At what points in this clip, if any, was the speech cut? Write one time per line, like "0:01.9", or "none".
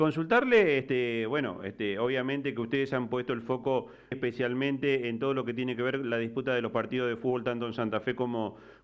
0:04.1